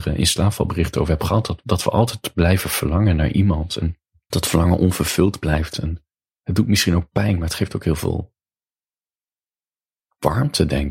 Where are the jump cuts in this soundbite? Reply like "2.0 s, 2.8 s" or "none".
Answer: 4.3 s, 5.7 s